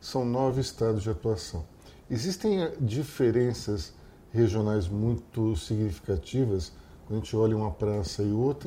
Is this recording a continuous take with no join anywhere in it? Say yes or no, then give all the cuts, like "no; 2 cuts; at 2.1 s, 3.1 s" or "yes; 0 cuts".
yes; 0 cuts